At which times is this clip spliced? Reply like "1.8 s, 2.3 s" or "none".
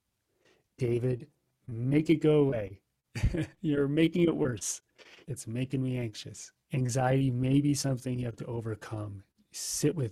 5.2 s, 6.6 s